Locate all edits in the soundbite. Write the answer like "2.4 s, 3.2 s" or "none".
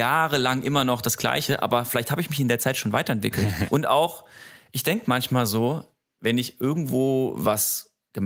3.7 s